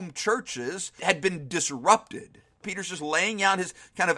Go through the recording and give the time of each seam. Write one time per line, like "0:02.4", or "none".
0:01.0
0:02.6